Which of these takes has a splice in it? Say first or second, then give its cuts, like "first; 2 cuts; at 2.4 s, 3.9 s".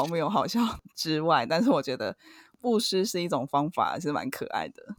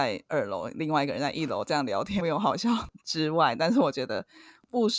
second; 1 cut; at 2.2 s